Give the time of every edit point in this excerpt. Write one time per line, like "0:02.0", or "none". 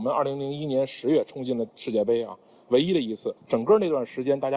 0:03.4